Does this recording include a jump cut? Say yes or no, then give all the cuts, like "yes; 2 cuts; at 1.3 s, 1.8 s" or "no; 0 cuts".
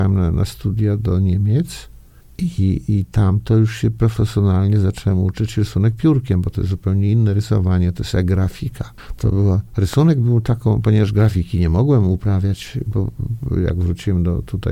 no; 0 cuts